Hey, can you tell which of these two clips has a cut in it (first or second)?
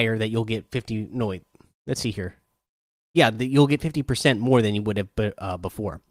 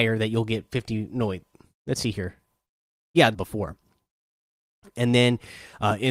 second